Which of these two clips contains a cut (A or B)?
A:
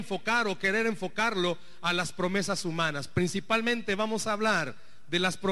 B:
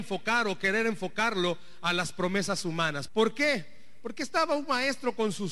B